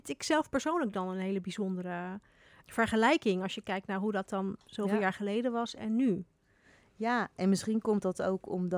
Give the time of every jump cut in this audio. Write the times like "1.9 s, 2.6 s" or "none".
2.6 s